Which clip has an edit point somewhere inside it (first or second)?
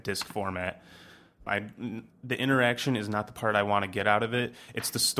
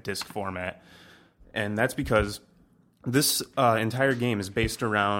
first